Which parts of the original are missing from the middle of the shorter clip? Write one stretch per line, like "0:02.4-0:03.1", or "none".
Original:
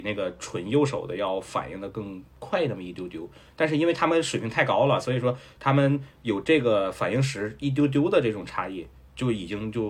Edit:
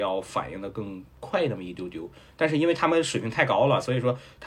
none